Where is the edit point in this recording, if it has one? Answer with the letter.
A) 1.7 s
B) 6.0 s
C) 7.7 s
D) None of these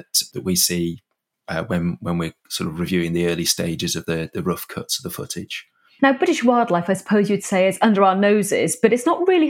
B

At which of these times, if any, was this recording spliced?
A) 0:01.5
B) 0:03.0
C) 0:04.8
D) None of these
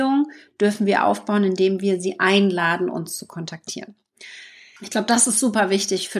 C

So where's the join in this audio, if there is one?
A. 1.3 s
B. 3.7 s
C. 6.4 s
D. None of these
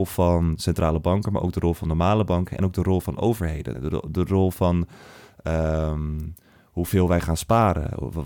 B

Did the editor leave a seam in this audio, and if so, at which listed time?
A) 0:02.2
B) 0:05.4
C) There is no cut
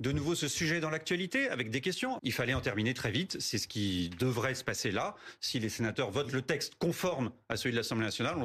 A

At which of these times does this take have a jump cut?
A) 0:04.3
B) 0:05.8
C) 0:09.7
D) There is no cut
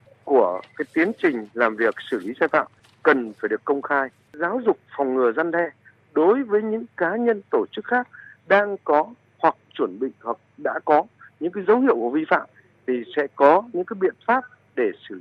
A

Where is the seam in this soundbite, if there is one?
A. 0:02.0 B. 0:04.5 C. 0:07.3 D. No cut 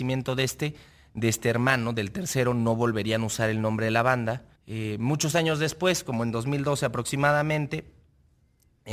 B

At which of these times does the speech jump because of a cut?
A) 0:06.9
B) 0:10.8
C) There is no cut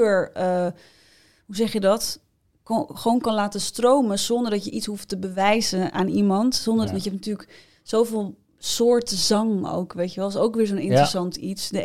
A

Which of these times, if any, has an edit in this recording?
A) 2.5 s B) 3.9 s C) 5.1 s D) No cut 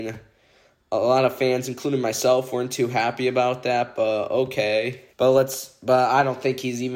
C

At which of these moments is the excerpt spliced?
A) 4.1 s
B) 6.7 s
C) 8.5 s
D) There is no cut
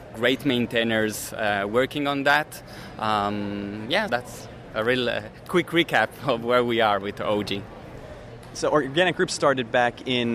A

